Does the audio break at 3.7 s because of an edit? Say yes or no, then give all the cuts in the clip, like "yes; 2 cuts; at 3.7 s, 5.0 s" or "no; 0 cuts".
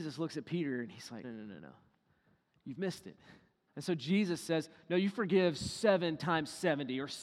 yes; 2 cuts; at 1.2 s, 3.7 s